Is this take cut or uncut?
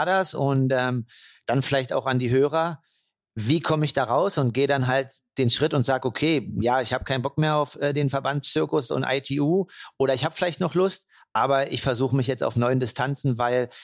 uncut